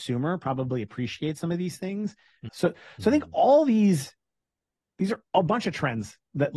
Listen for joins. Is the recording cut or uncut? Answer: cut